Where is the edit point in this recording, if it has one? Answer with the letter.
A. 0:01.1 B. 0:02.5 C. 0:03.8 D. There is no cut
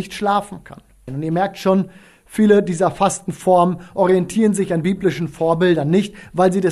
A